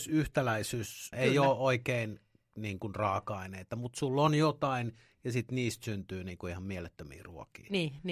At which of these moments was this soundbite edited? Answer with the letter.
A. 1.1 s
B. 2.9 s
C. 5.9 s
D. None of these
A